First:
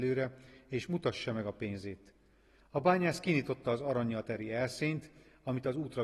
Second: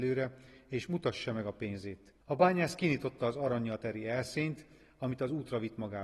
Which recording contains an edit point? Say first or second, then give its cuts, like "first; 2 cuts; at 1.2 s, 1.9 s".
second; 1 cut; at 2.2 s